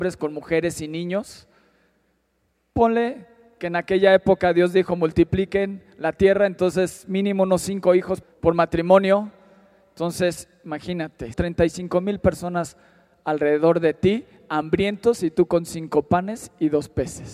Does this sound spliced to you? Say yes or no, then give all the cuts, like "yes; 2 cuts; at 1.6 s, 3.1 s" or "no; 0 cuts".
yes; 2 cuts; at 8.2 s, 11.3 s